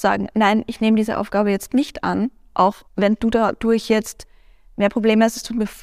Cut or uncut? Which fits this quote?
cut